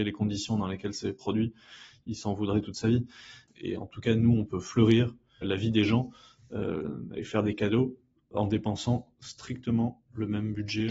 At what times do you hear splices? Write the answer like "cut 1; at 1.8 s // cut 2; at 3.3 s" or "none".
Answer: cut 1; at 3.5 s // cut 2; at 5.4 s